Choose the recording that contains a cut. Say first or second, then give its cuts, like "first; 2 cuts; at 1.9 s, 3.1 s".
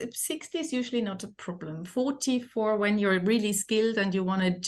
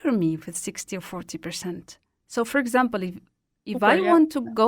second; 1 cut; at 2.3 s